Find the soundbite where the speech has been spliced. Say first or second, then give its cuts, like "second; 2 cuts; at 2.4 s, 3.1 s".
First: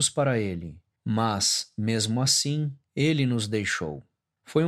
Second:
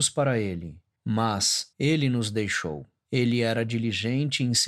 second; 2 cuts; at 1.7 s, 3.0 s